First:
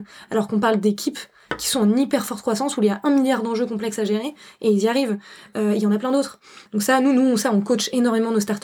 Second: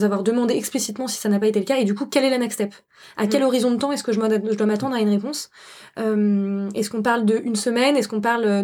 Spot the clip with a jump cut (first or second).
first